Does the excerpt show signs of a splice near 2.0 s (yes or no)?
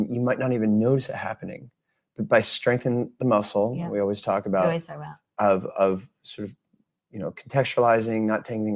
no